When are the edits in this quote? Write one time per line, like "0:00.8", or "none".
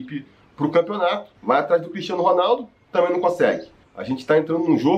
0:01.4
0:03.8